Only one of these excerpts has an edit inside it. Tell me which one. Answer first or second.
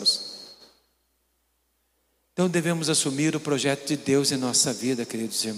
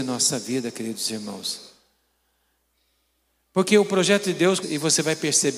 second